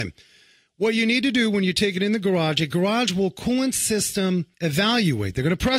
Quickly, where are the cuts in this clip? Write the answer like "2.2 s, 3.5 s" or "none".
4.5 s